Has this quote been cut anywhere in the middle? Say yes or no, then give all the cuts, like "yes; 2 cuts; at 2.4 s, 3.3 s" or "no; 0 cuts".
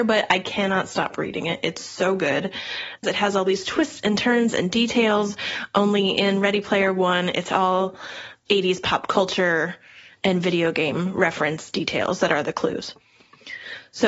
yes; 1 cut; at 3.0 s